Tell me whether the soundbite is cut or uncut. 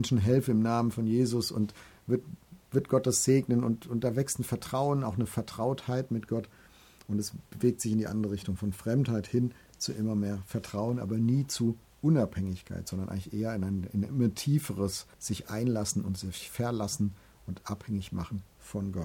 cut